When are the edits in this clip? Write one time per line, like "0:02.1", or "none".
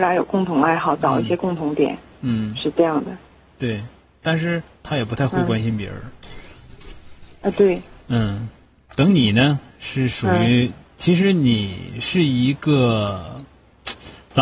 none